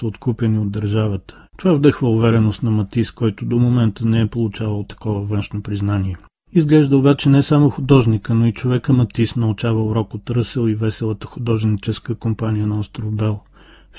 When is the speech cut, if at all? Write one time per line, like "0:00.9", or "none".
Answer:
0:01.4